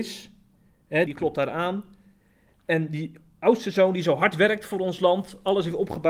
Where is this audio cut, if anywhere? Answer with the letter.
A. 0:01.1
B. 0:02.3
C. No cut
A